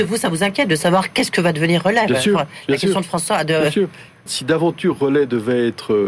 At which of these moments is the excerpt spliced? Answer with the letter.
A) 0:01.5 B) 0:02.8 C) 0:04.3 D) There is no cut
C